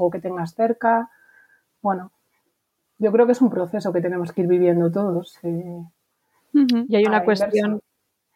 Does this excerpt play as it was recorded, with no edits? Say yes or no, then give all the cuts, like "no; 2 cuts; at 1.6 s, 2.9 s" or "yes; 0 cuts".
yes; 0 cuts